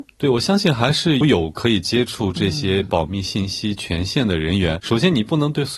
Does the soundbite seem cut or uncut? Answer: cut